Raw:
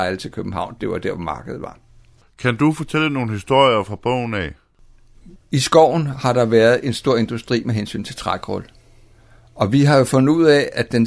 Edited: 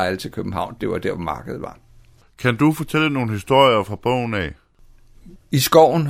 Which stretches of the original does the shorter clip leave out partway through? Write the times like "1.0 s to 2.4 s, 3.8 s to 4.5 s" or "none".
none